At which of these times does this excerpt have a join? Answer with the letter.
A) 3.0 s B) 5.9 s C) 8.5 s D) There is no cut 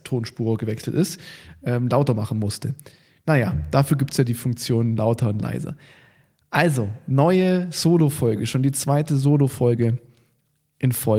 D